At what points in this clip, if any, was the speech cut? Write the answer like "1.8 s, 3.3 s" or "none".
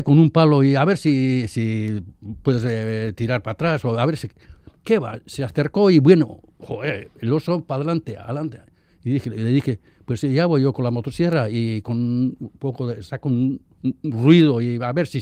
none